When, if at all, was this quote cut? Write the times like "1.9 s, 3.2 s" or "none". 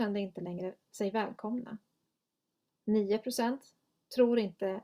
2.7 s